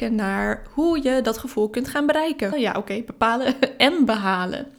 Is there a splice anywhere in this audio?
yes; 1 cut; at 2.5 s

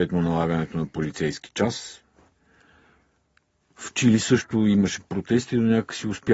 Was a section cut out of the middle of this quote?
no; 0 cuts

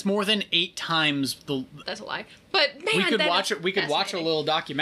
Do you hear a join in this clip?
yes; 1 cut; at 1.8 s

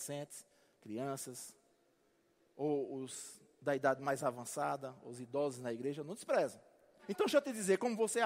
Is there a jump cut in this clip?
yes; 1 cut; at 7.0 s

